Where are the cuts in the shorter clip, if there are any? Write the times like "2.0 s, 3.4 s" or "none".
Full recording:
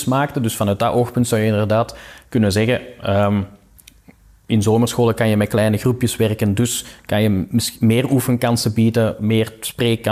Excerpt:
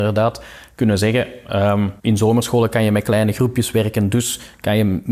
2.0 s